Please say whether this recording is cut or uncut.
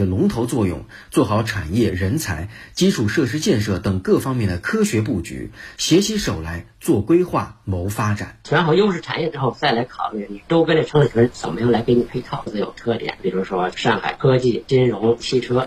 cut